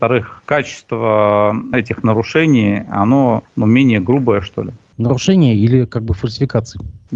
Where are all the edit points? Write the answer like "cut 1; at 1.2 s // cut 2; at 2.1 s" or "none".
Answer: none